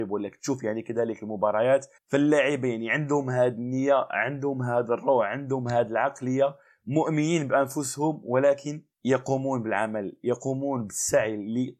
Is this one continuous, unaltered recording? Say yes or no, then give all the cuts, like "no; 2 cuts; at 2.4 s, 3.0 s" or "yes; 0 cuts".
no; 2 cuts; at 2.0 s, 8.9 s